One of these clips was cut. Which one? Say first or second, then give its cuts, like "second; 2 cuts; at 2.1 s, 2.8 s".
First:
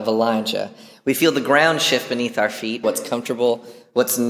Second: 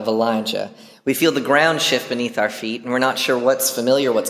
first; 1 cut; at 2.8 s